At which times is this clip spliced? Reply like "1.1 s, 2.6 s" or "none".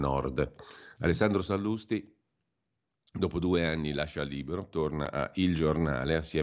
1.0 s

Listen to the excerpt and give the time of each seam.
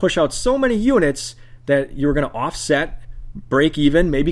none

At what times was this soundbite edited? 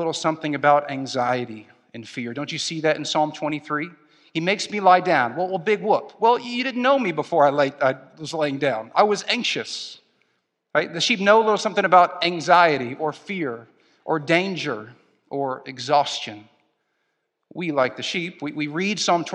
none

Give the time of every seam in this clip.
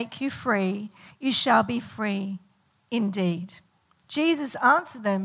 4.0 s

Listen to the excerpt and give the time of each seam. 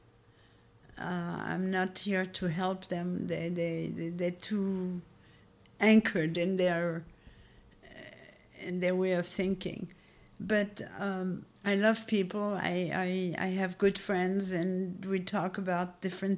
11.5 s

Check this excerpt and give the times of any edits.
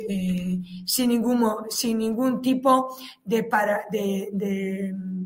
none

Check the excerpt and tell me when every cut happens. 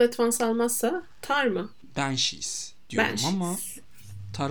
none

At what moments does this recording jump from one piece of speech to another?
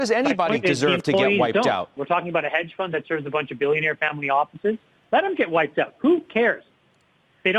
2.0 s, 5.0 s

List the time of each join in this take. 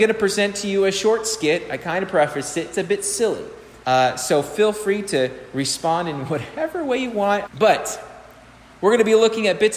3.8 s, 7.5 s

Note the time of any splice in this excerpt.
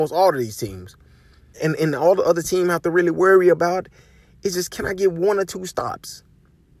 1.5 s

